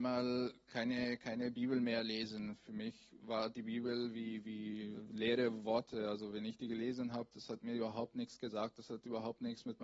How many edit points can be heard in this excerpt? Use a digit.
0